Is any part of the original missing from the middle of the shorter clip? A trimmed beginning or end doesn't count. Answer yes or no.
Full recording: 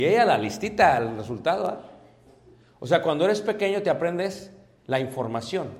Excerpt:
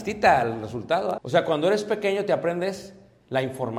yes